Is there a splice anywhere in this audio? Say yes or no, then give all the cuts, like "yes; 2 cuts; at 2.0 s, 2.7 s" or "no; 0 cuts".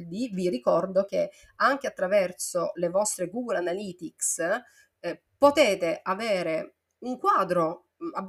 no; 0 cuts